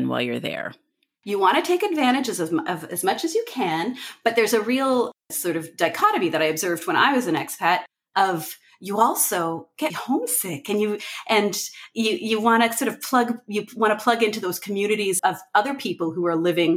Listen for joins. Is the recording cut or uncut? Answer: cut